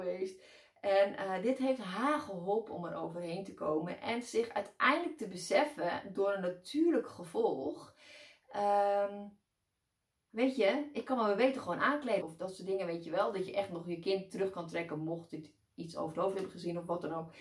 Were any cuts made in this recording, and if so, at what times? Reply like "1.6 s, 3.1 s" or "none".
10.3 s, 12.2 s